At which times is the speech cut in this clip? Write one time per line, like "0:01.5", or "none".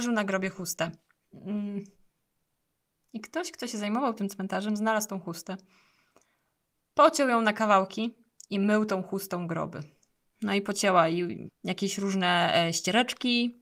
0:10.3
0:11.5